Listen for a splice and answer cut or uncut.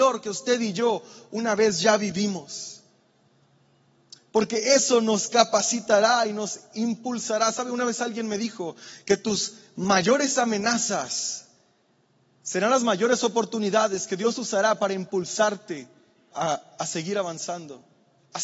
cut